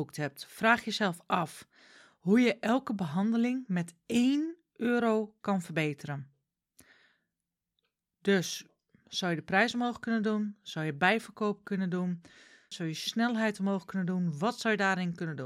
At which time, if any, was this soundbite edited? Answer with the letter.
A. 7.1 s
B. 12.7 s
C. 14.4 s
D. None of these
B